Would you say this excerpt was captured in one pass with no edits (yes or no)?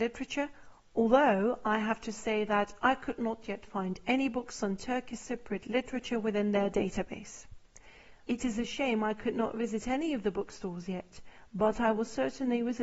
no